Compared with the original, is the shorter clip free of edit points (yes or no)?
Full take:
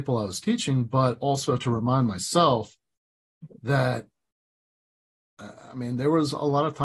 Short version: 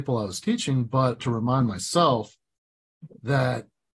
no